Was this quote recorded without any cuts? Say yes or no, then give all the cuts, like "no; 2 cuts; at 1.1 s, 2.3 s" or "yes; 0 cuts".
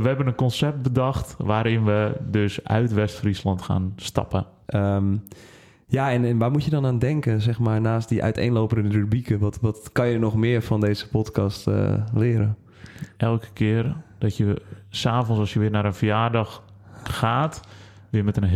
no; 1 cut; at 4.7 s